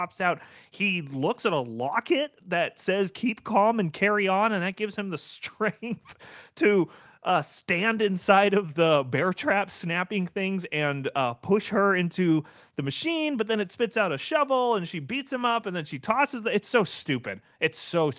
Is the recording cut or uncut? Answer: uncut